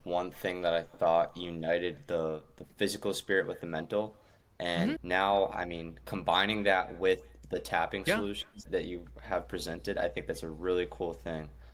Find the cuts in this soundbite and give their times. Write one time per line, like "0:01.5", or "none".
0:05.0
0:08.7